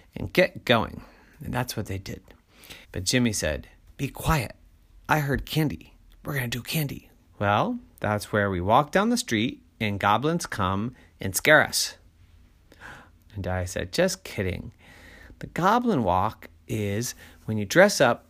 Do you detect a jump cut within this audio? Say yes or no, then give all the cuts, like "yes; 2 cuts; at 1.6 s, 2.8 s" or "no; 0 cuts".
yes; 3 cuts; at 2.8 s, 7.2 s, 13.2 s